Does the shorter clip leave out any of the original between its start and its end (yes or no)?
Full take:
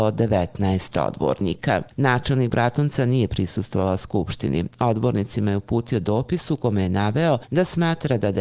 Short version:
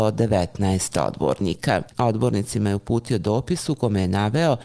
yes